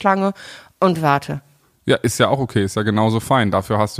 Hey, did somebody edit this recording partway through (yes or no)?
no